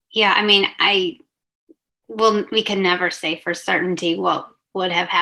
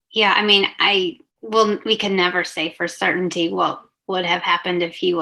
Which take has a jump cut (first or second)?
second